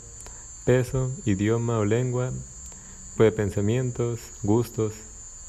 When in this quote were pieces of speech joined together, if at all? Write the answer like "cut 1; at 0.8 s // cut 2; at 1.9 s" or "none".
cut 1; at 3.2 s